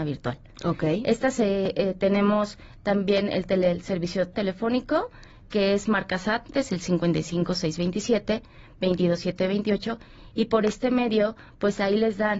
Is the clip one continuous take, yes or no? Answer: no